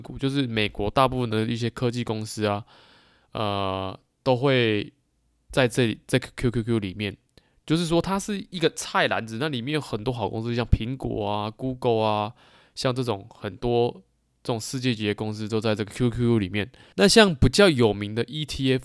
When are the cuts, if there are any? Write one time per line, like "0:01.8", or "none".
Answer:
0:16.9